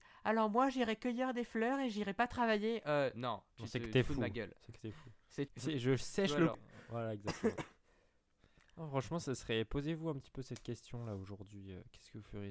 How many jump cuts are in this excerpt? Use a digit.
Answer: 2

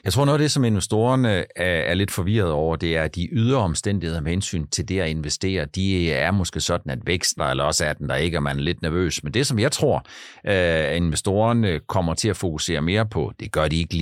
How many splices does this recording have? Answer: 1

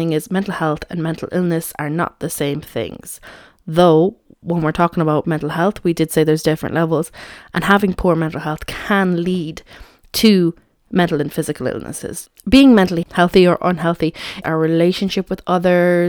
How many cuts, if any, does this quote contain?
2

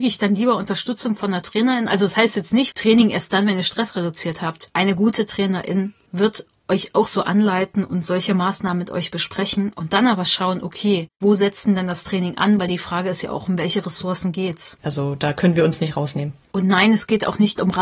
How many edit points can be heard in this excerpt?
2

